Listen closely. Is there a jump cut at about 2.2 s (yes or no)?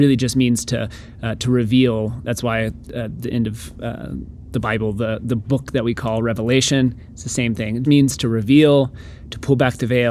no